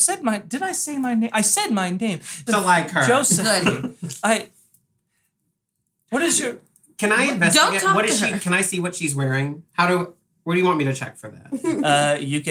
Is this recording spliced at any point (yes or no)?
yes